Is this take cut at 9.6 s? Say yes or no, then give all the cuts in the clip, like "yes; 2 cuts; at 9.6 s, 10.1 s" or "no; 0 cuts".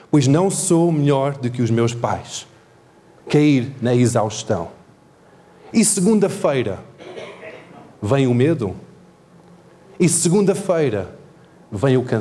no; 2 cuts; at 3.2 s, 5.7 s